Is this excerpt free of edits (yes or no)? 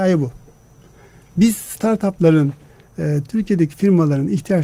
no